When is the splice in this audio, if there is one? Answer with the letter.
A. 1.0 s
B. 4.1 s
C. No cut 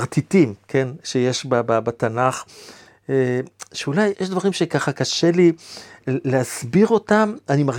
B